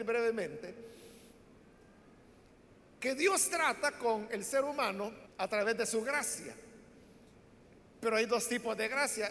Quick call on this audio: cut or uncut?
cut